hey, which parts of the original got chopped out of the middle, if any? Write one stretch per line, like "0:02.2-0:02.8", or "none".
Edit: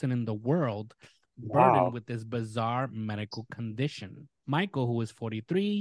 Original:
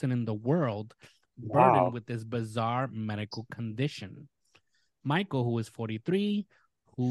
0:04.4-0:04.9